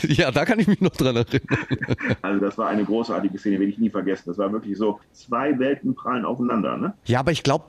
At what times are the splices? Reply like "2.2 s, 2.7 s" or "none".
none